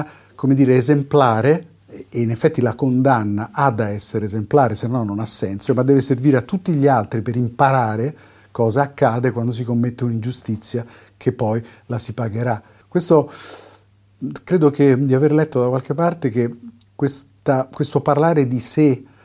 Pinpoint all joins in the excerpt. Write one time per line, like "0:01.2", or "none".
0:05.7
0:12.8